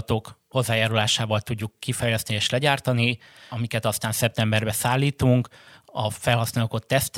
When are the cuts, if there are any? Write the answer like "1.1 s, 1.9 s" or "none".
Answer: none

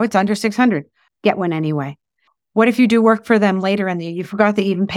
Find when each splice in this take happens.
1.1 s

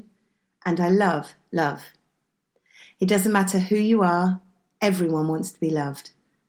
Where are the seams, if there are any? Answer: none

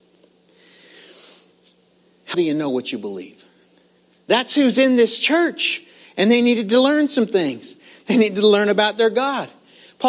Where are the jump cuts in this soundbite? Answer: 2.3 s, 4.2 s

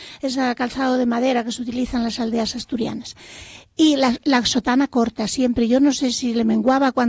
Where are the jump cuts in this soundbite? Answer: none

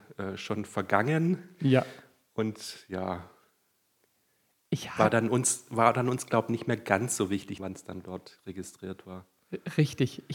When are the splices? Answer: 7.6 s

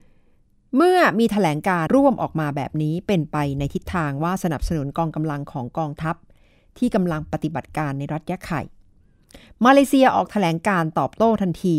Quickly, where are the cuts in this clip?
1.9 s

